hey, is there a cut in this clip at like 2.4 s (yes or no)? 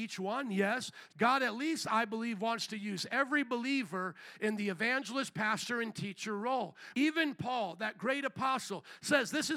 no